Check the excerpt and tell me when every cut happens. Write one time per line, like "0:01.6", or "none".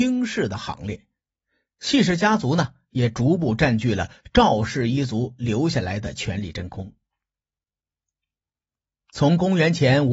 none

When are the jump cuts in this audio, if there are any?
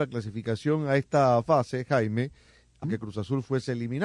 0:02.8

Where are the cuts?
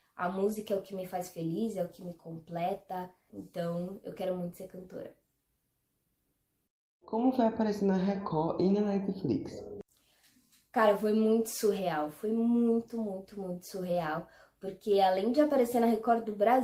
0:03.3

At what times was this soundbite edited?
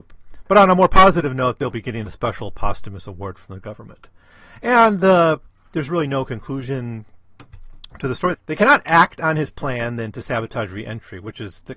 0:08.3

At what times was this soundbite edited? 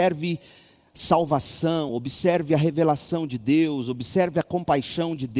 none

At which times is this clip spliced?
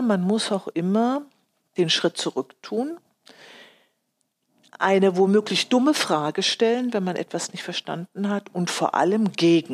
none

